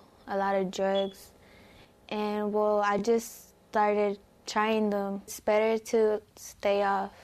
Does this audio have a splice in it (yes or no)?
no